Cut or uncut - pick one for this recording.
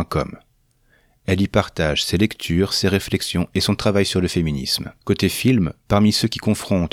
cut